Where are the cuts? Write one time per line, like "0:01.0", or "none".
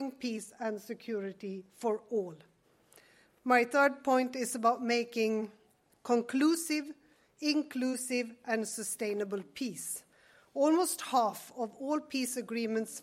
none